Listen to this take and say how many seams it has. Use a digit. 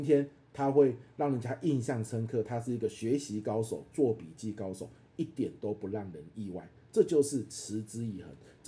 0